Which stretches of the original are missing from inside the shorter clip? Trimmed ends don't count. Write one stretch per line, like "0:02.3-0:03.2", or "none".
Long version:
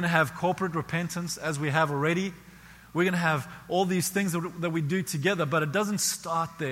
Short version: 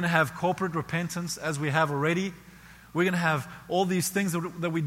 none